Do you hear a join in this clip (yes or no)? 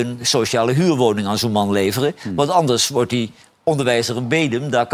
no